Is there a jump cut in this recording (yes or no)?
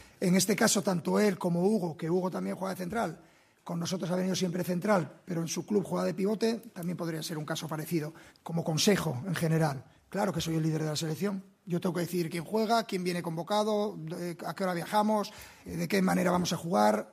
yes